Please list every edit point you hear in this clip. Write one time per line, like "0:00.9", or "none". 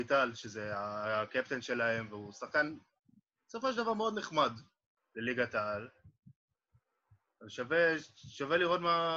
0:05.0